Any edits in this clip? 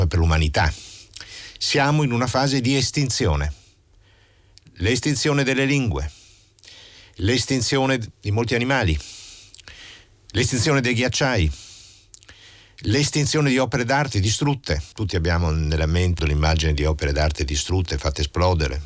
yes; 2 cuts; at 14.9 s, 16.2 s

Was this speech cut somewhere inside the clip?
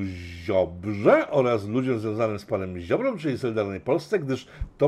no; 0 cuts

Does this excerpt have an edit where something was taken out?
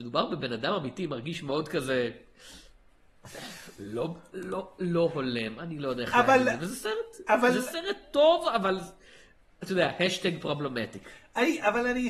no; 0 cuts

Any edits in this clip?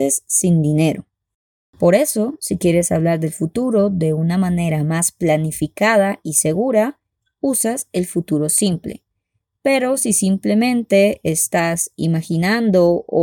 yes; 1 cut; at 1.7 s

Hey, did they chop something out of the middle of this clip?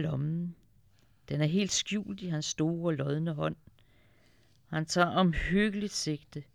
no; 0 cuts

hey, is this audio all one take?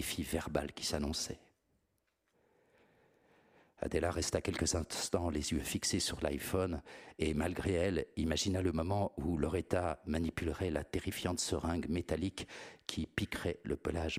yes; 0 cuts

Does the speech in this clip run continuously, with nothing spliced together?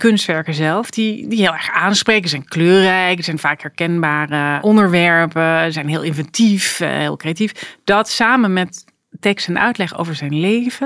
yes; 0 cuts

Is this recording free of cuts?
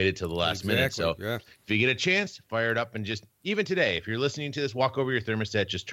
yes; 0 cuts

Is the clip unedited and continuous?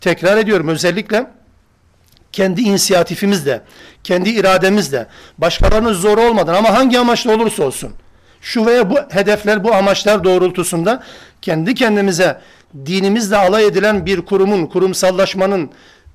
yes; 0 cuts

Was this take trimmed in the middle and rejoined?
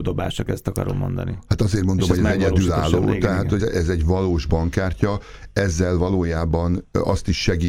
yes; 1 cut; at 3.6 s

